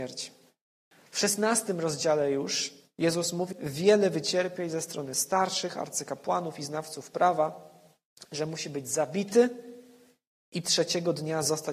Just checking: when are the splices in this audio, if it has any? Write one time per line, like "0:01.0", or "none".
0:01.1
0:03.5